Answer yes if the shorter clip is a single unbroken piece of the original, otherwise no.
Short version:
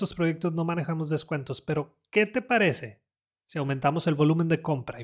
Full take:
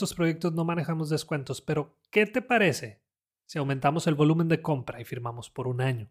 yes